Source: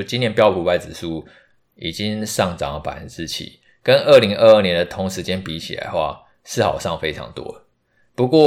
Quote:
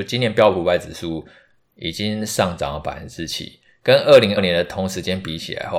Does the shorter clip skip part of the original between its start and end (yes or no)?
yes